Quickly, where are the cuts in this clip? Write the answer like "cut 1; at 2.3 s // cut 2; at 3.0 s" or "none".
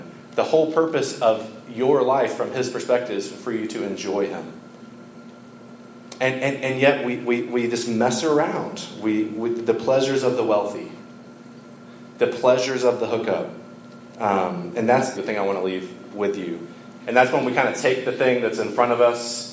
cut 1; at 14.1 s // cut 2; at 15.1 s // cut 3; at 17.0 s